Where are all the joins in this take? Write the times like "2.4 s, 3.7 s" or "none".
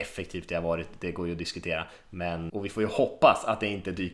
2.5 s